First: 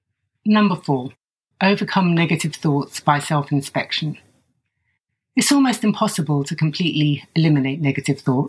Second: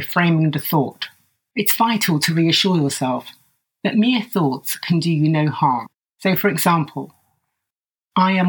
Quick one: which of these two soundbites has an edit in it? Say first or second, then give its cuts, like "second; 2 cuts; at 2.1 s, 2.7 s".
second; 2 cuts; at 1.5 s, 6.1 s